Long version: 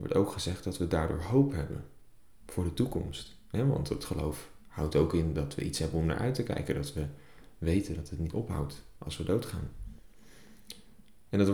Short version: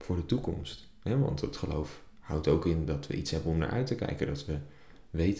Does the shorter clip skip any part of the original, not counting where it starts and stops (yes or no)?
no